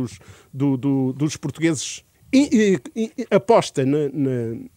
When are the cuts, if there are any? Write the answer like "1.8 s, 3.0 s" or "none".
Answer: 2.1 s